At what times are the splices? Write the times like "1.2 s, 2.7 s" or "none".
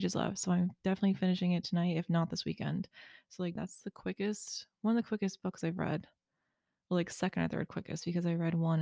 3.6 s